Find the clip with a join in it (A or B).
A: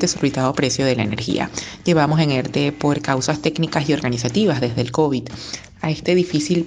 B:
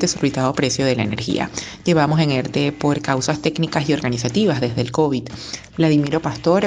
B